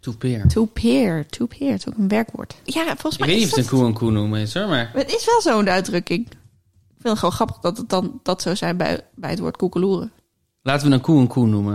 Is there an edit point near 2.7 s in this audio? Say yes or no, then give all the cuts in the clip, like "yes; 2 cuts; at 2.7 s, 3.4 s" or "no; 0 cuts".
yes; 1 cut; at 2.7 s